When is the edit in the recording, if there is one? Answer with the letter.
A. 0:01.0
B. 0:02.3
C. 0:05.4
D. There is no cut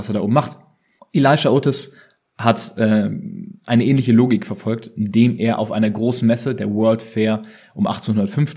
A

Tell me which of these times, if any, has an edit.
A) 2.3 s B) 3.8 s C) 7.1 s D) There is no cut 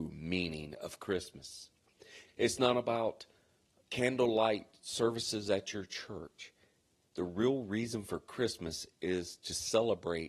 A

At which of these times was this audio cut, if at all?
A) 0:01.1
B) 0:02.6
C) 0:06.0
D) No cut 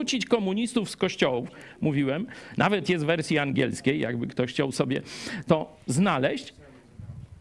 D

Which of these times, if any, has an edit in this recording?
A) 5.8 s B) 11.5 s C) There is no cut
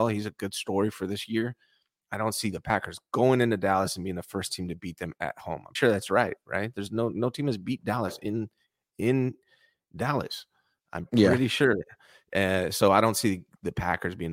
A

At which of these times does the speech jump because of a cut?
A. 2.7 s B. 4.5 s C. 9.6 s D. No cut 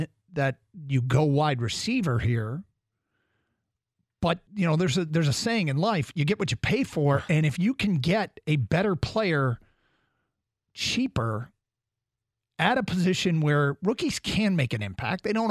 B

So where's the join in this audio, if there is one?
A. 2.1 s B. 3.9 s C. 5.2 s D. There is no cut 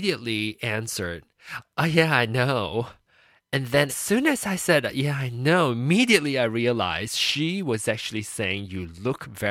B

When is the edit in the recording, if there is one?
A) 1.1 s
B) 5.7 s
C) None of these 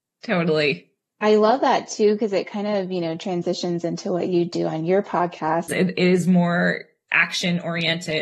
B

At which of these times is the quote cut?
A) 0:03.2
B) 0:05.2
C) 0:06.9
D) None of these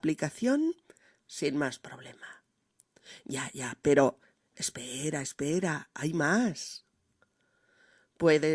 D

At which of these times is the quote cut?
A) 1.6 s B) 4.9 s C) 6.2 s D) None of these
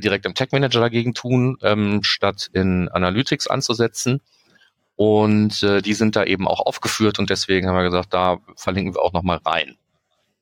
D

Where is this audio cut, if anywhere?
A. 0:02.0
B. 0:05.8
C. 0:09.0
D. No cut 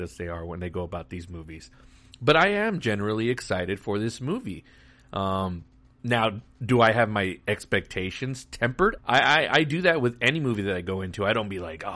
C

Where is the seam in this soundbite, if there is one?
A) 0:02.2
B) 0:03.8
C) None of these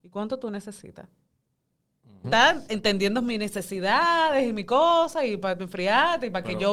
A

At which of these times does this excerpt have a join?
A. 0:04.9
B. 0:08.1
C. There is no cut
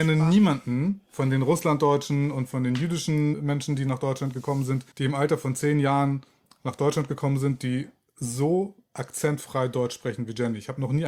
A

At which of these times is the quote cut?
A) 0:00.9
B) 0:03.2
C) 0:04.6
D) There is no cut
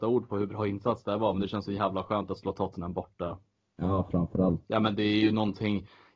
C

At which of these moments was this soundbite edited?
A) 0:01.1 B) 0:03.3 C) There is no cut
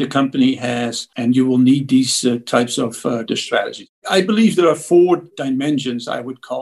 B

